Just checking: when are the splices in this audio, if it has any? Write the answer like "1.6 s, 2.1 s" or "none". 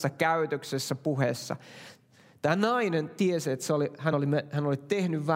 none